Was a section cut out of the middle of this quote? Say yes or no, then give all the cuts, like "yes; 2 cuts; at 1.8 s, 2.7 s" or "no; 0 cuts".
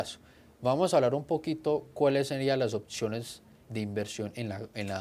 yes; 1 cut; at 3.7 s